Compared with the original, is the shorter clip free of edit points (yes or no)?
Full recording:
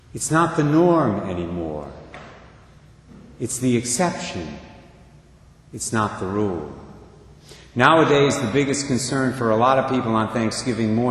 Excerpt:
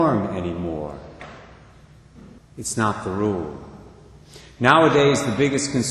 no